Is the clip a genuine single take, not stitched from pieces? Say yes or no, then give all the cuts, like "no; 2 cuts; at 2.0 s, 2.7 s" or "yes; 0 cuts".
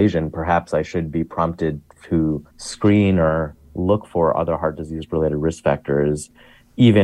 no; 1 cut; at 2.5 s